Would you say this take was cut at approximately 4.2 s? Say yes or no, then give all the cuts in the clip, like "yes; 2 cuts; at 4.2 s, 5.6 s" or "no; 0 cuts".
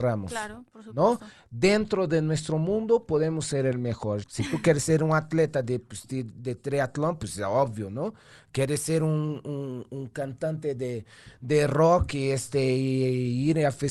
yes; 1 cut; at 4.2 s